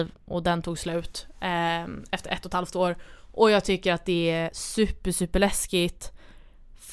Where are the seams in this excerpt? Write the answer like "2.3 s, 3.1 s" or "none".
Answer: none